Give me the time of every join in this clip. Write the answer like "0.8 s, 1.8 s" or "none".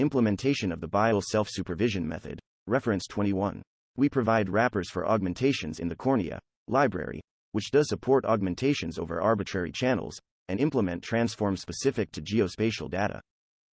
3.8 s, 6.5 s